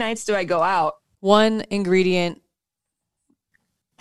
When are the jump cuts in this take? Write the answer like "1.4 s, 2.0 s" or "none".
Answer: 1.1 s